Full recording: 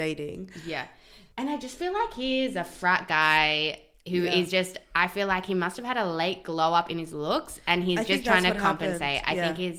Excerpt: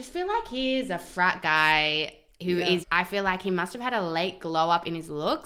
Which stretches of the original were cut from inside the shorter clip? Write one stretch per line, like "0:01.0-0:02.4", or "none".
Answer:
0:04.5-0:04.9